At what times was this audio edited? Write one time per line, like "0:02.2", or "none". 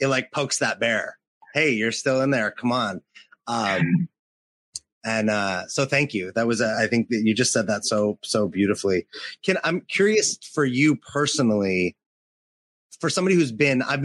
none

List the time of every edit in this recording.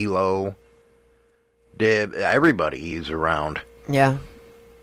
none

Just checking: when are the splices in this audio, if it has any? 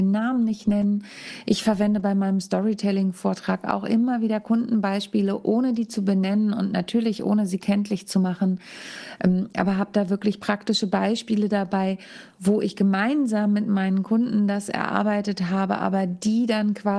none

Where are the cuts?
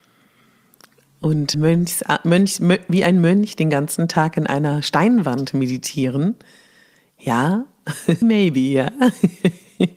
0:01.5
0:08.2

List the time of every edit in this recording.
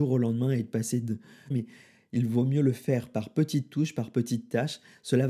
0:01.5

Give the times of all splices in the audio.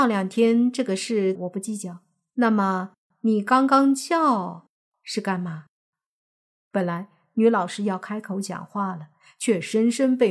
0:01.3
0:06.6

